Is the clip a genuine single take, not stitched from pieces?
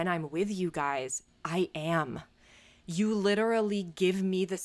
yes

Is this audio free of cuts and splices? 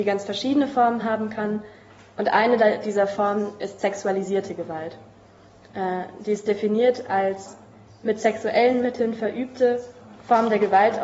yes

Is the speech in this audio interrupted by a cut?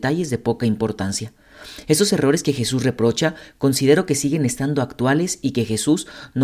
no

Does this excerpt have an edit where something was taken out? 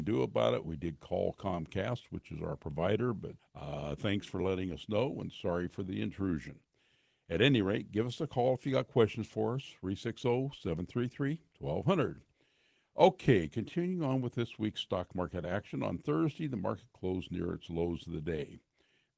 yes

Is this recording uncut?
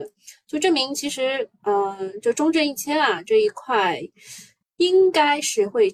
yes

